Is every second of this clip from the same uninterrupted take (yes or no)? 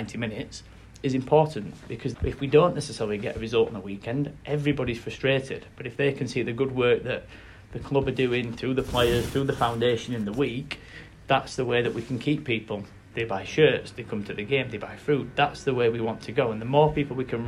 no